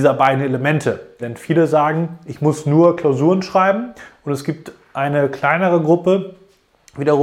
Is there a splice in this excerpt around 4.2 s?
no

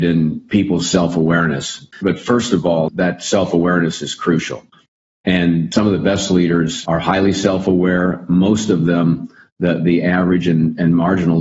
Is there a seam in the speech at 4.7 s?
no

